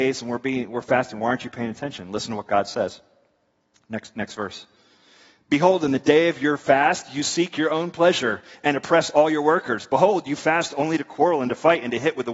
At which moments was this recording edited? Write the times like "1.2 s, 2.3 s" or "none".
none